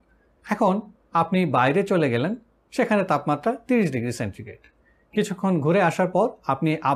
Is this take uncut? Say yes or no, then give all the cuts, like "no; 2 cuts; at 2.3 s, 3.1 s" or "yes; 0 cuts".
yes; 0 cuts